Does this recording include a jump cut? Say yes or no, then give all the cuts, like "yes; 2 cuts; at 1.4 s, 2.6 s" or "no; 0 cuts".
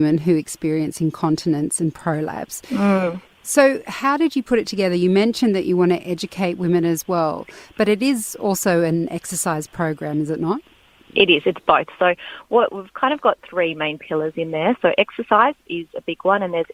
no; 0 cuts